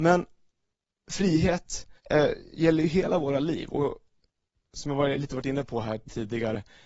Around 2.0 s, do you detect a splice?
yes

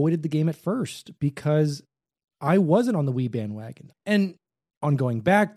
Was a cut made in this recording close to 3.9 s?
yes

